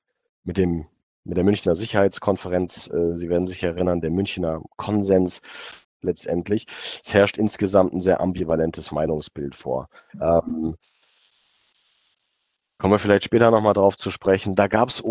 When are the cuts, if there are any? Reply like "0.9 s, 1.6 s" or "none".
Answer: 5.8 s, 10.1 s